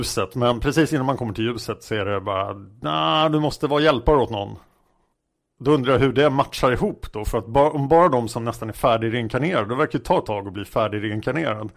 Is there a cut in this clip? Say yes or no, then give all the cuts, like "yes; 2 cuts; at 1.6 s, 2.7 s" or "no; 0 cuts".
no; 0 cuts